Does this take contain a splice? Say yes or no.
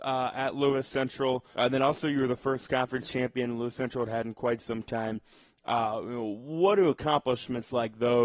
yes